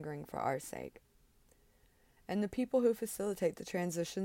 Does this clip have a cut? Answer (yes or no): yes